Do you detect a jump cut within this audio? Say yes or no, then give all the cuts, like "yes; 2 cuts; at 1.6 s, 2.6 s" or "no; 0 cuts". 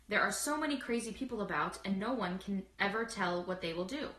yes; 1 cut; at 2.7 s